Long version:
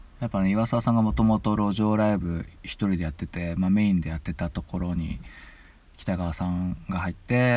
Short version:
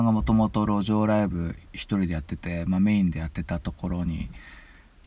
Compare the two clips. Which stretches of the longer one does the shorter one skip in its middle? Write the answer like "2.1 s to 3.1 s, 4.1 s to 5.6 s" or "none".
none

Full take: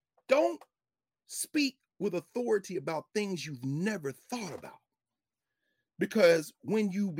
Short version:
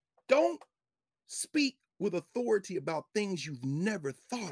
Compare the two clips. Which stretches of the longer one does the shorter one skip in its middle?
none

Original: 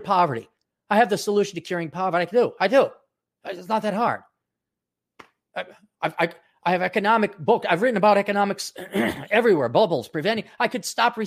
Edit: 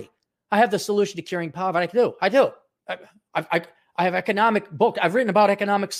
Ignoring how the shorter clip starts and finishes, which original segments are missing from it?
3.2 s to 5.5 s

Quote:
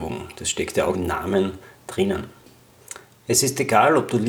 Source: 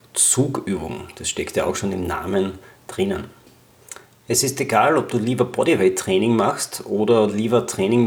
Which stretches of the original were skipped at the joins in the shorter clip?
1.7 s to 1.9 s

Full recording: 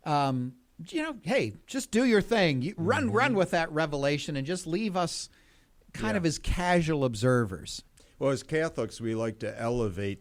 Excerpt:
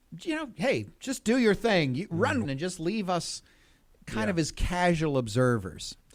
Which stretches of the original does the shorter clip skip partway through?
3.1 s to 4.3 s

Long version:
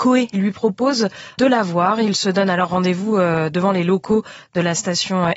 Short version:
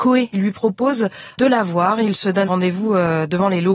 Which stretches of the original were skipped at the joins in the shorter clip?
2.4 s to 2.7 s

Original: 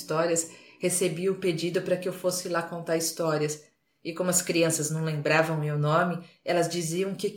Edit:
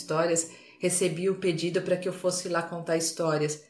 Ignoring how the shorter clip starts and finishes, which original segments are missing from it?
none

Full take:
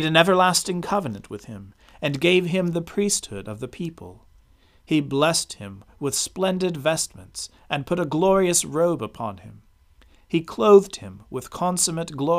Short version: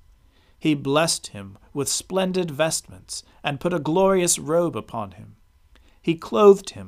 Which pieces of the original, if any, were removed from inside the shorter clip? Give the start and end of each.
none

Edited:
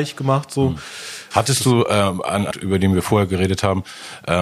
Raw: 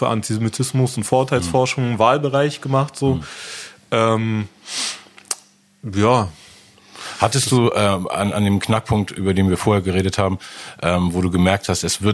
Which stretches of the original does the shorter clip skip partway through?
3.8 s to 7.2 s, 8.4 s to 9.1 s

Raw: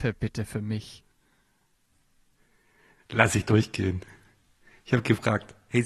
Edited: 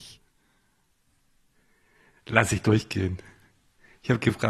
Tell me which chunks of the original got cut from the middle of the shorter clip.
none

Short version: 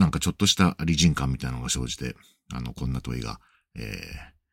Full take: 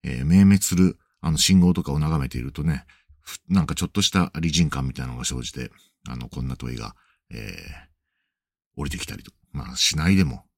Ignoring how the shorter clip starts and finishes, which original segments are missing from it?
none

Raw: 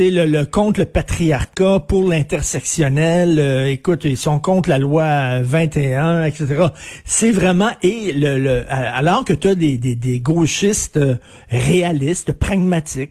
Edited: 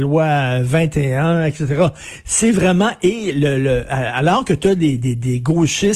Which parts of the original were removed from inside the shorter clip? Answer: none

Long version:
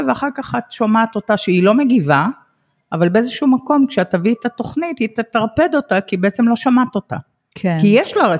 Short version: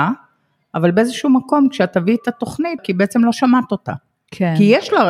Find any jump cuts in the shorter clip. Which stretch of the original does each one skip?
5.0 s to 6.0 s

